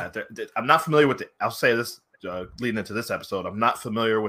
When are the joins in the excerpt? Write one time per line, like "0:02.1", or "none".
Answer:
none

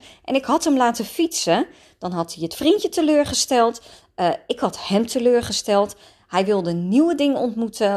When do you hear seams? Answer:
none

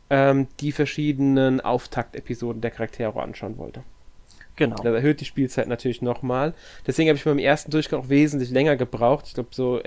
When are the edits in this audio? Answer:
0:04.8

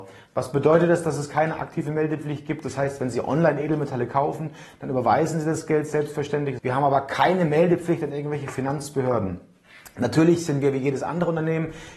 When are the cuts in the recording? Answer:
0:06.6

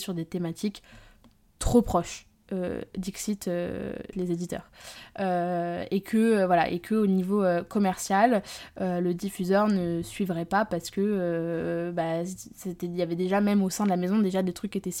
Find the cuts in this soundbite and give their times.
0:04.1

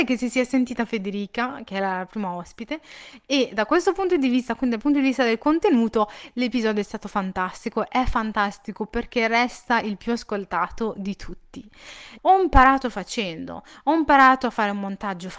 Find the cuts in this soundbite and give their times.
0:12.2

